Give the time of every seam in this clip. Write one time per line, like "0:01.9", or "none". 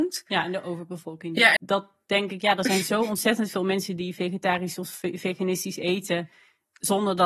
0:01.6